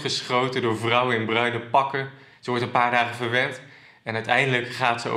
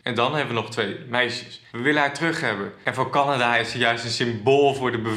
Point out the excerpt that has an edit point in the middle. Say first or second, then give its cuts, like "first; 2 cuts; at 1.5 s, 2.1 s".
second; 1 cut; at 1.7 s